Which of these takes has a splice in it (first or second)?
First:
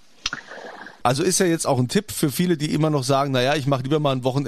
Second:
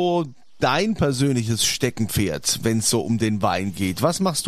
first